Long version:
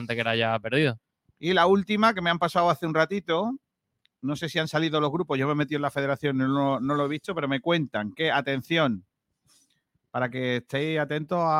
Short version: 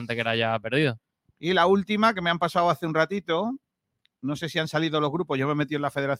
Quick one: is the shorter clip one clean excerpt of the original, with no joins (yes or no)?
yes